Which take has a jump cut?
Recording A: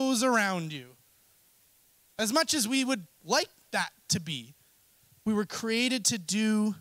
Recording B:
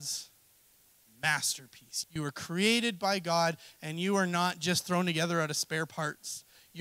B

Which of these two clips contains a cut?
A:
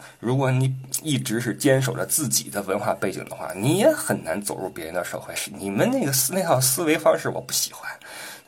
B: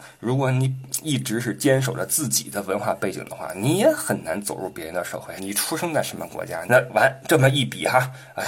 B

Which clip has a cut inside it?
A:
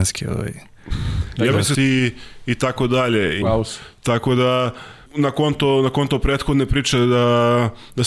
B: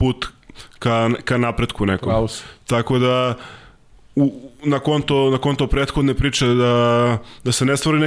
A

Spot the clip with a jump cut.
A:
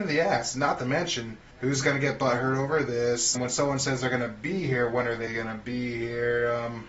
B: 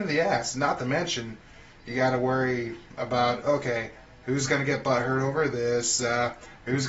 A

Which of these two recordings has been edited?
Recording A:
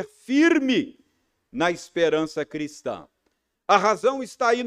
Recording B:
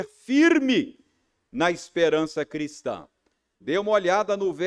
B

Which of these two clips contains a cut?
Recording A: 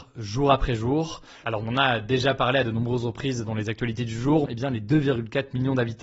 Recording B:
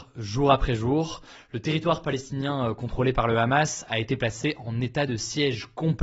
A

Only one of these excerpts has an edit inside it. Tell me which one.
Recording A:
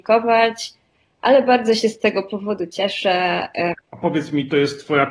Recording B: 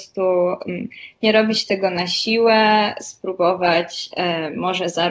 A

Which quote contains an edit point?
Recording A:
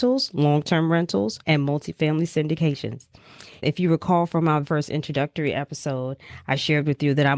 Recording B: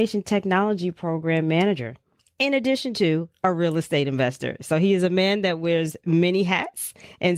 A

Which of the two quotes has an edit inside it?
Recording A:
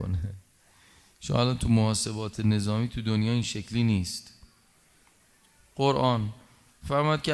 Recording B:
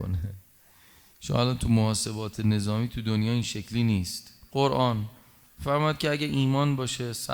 B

